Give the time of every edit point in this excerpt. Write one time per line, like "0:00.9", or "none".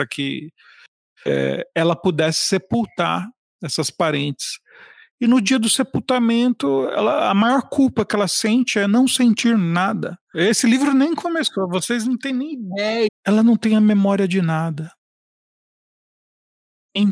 0:10.3
0:13.1

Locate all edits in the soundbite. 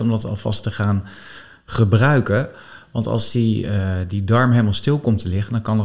none

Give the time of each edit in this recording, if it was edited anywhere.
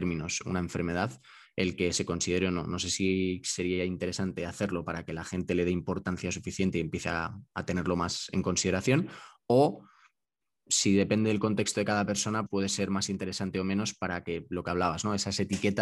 0:12.5

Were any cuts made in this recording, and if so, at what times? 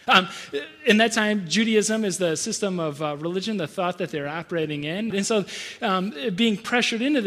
0:05.1

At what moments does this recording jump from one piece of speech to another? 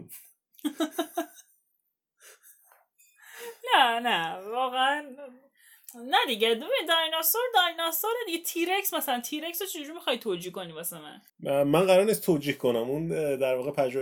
0:11.3

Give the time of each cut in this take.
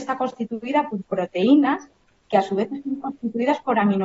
none

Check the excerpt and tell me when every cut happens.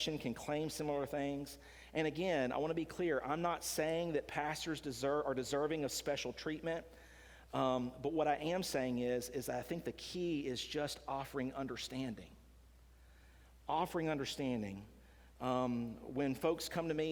none

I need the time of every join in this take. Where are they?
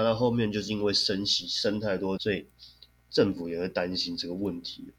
0:02.2

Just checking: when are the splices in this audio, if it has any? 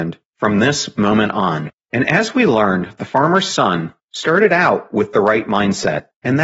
none

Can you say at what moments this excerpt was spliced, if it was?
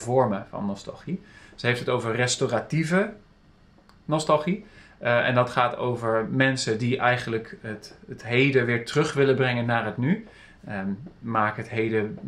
none

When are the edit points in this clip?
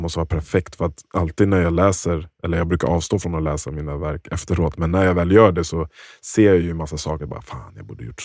none

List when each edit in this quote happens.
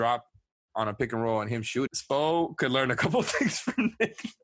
0:01.9

